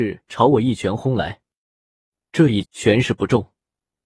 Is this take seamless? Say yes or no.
no